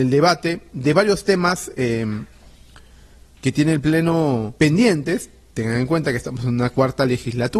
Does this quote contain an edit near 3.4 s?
no; 1 cut; at 4.6 s

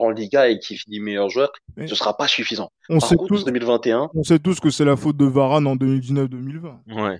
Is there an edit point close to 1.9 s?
no; 1 cut; at 3.5 s

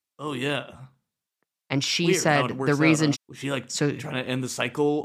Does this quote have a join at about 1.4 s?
no; 1 cut; at 3.1 s

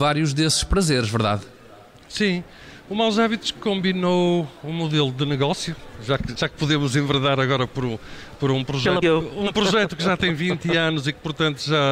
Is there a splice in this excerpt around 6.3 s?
yes; 2 cuts; at 6.3 s, 9.0 s

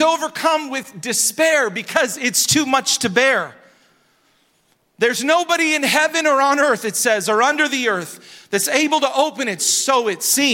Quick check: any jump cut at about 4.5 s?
no; 1 cut; at 9.6 s

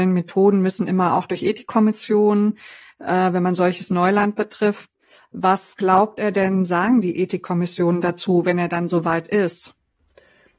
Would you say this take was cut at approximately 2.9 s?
no; 0 cuts

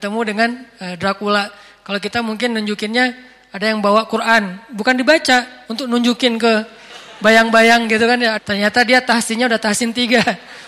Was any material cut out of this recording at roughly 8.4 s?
yes; 1 cut; at 8.4 s

